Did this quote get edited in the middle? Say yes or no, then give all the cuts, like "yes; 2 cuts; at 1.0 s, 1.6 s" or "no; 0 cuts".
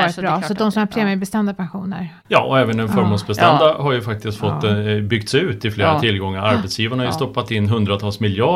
yes; 1 cut; at 2.2 s